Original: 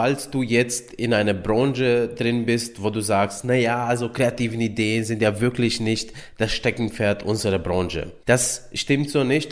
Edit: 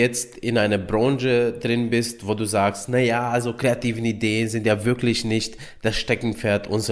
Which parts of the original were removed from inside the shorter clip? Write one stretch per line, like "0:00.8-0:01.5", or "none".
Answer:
none

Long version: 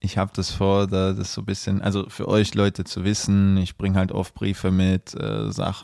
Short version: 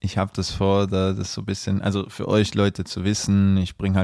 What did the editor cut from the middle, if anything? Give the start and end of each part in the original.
none

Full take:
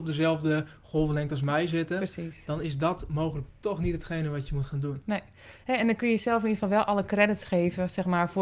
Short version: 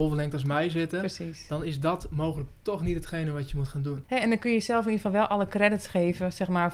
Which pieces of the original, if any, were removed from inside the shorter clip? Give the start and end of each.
0:05.0-0:05.6

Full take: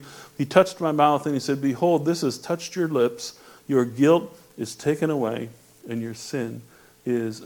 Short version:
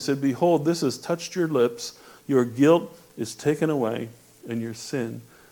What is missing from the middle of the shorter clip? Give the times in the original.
none

